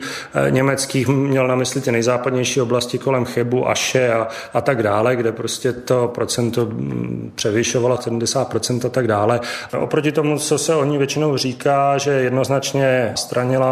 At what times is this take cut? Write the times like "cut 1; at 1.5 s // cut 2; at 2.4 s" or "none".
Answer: cut 1; at 9.7 s